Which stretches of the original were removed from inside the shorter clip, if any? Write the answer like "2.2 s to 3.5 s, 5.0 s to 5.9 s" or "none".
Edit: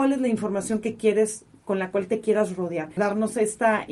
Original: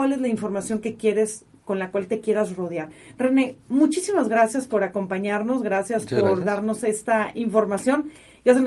3.0 s to 6.4 s